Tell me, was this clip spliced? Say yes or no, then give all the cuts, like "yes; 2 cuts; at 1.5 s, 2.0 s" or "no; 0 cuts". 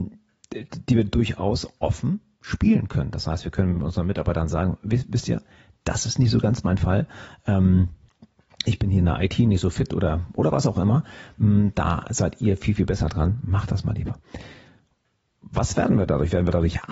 no; 0 cuts